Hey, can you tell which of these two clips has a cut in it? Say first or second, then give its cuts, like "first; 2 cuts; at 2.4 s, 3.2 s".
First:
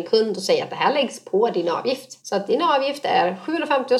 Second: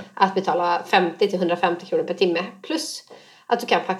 first; 1 cut; at 2.2 s